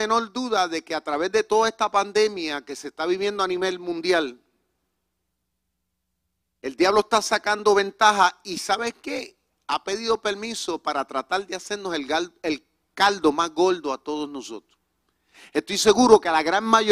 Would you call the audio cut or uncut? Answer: uncut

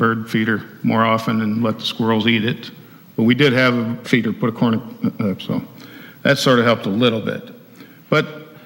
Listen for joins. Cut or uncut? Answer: cut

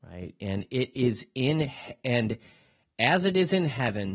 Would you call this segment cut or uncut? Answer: uncut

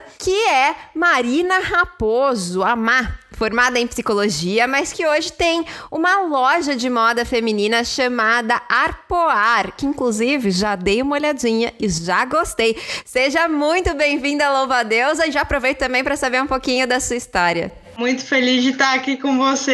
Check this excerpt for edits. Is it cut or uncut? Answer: uncut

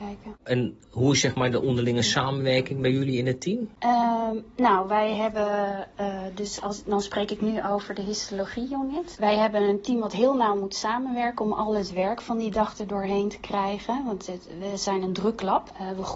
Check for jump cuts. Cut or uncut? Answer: uncut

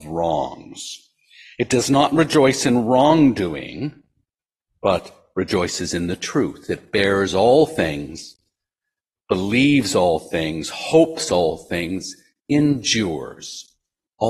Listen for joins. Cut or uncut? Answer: uncut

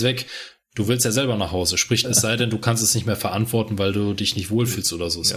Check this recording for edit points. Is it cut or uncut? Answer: cut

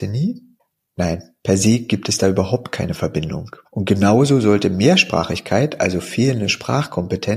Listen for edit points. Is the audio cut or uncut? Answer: cut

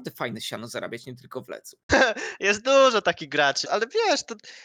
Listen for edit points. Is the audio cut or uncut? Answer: cut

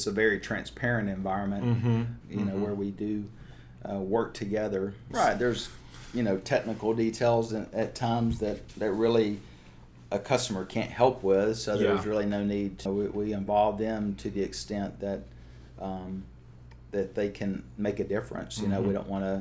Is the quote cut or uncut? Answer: cut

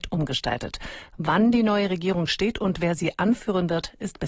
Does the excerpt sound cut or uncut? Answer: uncut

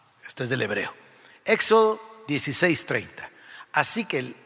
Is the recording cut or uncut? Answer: uncut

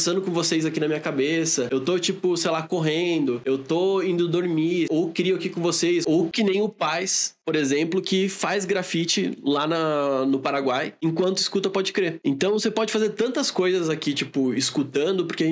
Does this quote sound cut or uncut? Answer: uncut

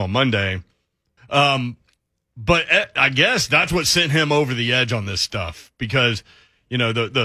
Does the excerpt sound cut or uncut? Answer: cut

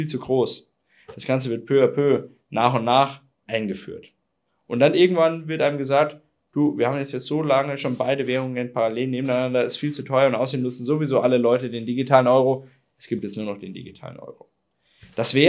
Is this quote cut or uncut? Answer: uncut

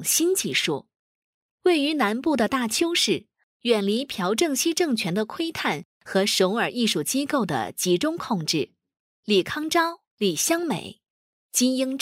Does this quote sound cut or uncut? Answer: cut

